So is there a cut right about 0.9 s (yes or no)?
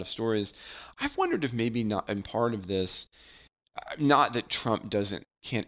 no